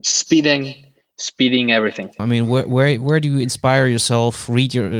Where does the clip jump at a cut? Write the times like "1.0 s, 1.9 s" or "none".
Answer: 2.2 s